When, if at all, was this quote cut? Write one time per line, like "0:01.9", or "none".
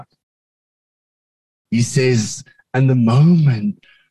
0:01.7